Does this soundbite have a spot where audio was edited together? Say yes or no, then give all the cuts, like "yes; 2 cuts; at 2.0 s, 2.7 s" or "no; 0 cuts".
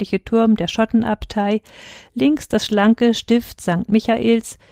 no; 0 cuts